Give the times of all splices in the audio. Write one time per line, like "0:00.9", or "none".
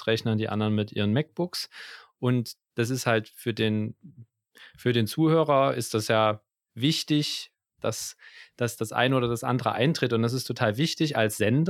0:07.7